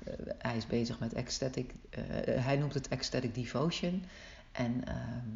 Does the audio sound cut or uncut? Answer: uncut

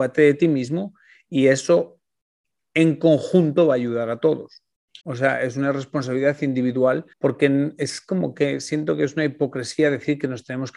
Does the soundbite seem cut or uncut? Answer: cut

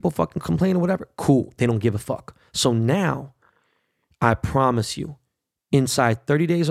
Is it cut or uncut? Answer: cut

